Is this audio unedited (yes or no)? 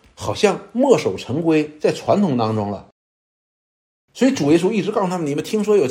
yes